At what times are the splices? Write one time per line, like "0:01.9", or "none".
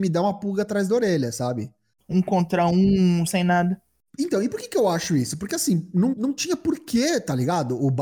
0:02.0
0:03.3
0:06.1